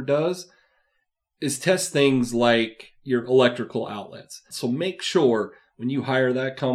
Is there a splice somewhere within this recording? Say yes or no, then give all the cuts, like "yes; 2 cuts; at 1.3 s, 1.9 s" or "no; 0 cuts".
yes; 1 cut; at 4.5 s